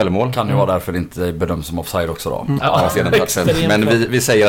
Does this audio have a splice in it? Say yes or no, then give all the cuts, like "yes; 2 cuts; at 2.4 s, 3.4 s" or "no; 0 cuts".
yes; 1 cut; at 2.6 s